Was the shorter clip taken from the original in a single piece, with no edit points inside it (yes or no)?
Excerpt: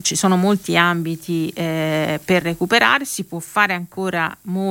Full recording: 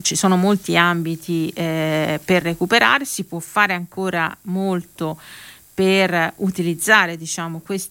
yes